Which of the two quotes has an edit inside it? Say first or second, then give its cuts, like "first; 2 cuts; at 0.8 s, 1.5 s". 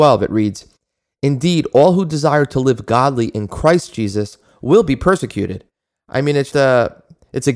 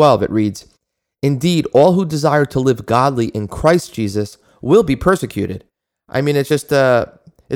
first; 1 cut; at 6.5 s